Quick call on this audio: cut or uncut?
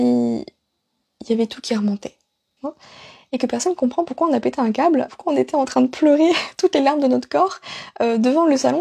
cut